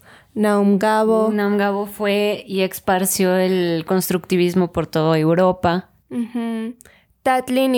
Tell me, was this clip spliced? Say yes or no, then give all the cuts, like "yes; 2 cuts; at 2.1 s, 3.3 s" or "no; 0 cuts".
no; 0 cuts